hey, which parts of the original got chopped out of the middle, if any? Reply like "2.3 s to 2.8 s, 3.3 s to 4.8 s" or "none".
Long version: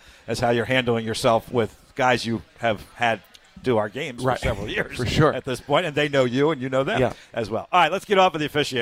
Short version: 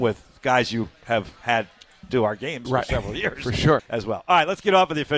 5.3 s to 7.2 s